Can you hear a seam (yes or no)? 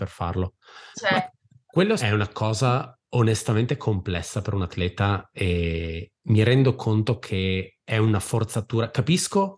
yes